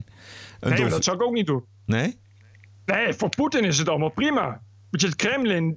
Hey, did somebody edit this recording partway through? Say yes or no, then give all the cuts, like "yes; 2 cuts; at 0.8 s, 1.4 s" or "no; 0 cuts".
no; 0 cuts